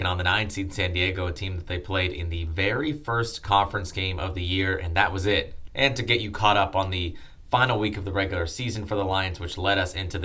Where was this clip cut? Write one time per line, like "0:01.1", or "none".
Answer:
0:05.7